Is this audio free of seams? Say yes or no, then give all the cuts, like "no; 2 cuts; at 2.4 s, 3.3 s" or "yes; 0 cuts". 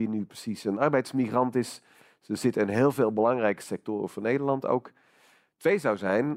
yes; 0 cuts